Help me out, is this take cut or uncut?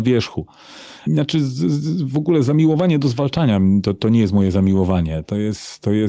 cut